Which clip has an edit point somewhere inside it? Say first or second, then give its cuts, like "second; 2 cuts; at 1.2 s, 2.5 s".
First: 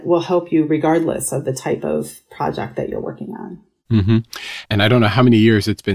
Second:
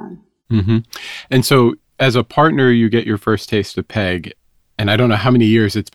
first; 1 cut; at 4.6 s